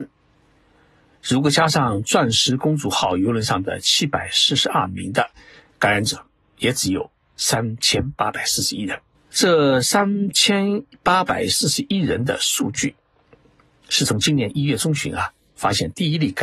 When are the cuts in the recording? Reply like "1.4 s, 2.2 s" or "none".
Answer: 9.1 s

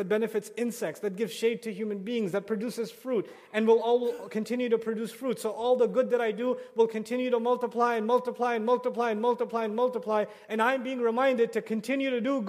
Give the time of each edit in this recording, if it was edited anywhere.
none

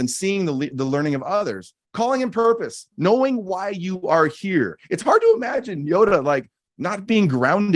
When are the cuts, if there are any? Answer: none

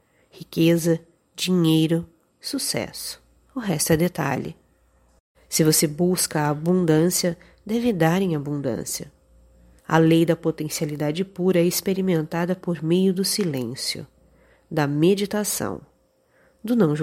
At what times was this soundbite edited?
3.5 s, 5.3 s, 9.8 s

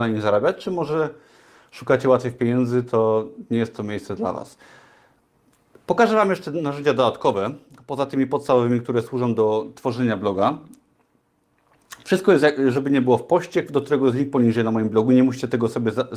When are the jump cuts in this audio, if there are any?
none

